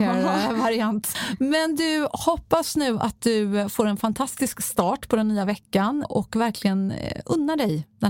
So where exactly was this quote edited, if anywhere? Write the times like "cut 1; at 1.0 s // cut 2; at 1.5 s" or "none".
cut 1; at 1.1 s // cut 2; at 6.0 s